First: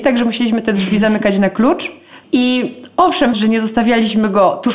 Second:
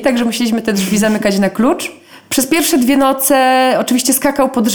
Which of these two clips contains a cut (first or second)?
first